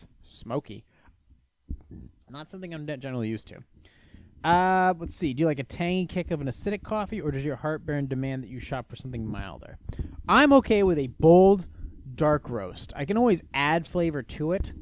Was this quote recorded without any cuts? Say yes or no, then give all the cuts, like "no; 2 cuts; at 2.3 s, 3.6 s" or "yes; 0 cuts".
no; 1 cut; at 2.2 s